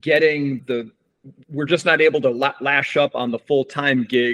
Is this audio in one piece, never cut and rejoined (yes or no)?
yes